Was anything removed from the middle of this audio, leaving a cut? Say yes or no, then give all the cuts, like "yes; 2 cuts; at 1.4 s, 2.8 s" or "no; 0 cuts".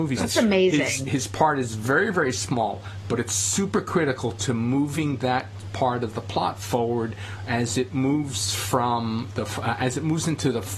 no; 0 cuts